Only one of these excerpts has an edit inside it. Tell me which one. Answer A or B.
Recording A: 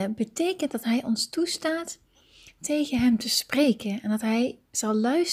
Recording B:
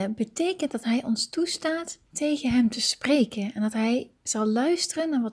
B